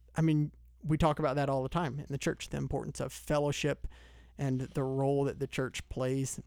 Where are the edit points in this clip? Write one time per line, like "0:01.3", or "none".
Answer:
0:02.5